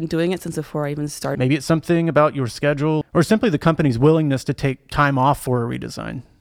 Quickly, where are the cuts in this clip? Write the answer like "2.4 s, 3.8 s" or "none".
1.3 s, 3.0 s